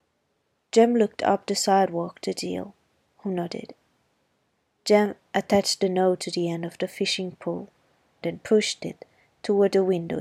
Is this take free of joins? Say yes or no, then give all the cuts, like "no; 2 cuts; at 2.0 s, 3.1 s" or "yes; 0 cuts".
no; 1 cut; at 8.2 s